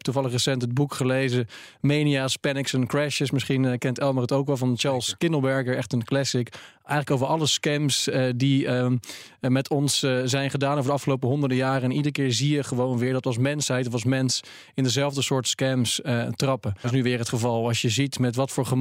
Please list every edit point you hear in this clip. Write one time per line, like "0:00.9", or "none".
0:16.8